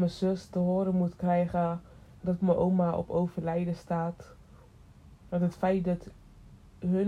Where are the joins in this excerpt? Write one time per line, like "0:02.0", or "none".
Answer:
0:02.2
0:05.3